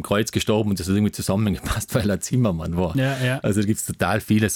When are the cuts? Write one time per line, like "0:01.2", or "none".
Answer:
none